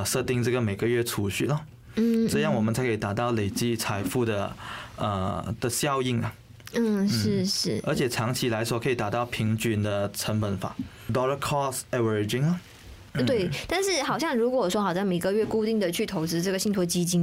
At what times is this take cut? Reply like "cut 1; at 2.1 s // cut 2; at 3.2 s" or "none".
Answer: none